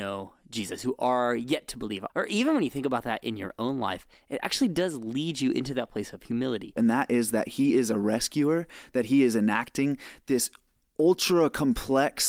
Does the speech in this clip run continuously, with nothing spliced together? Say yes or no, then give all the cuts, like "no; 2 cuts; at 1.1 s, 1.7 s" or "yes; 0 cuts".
no; 2 cuts; at 2.1 s, 6.8 s